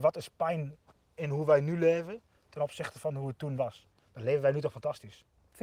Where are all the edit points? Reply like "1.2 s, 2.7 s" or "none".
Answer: none